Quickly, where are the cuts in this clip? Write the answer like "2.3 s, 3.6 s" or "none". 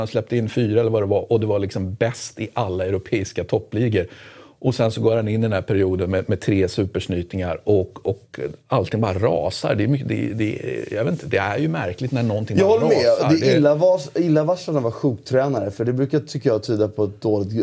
none